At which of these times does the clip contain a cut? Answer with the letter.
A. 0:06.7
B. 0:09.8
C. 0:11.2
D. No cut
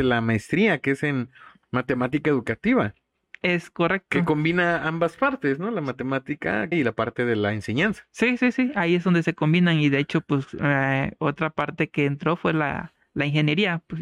A